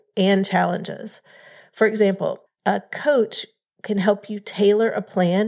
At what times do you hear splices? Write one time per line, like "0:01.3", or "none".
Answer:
0:02.5